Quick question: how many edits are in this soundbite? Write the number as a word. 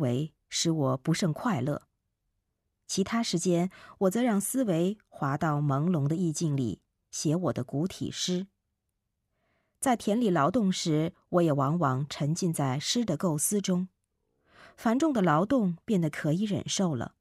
zero